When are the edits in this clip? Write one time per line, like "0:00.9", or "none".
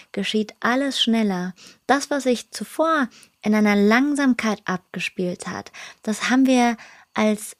none